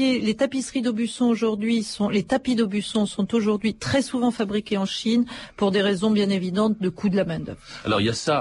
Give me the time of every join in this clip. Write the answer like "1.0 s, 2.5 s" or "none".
none